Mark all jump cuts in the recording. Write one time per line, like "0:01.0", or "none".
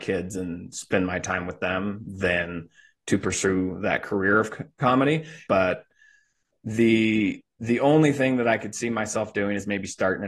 0:05.5

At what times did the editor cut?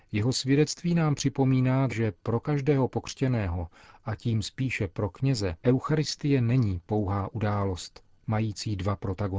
0:01.9
0:05.6

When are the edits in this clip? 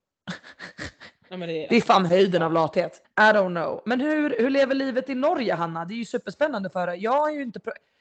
0:03.0

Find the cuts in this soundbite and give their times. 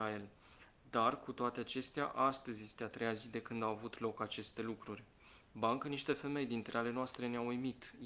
none

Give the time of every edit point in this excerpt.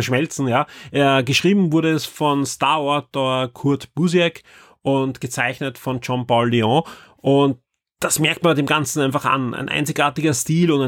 none

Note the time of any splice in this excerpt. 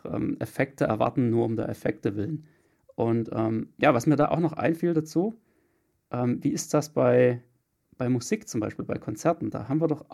0:02.7

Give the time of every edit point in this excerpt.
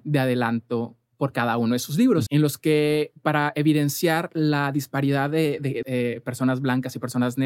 0:02.3
0:05.8

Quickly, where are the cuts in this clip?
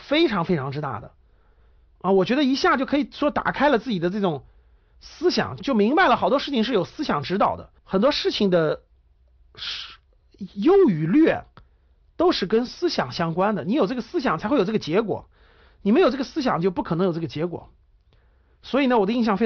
0:05.6
0:07.8

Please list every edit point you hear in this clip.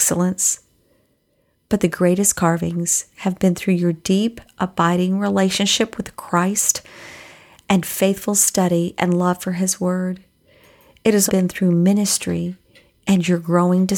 0:11.3

